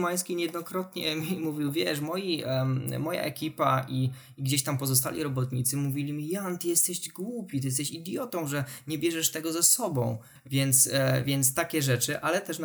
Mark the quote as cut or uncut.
cut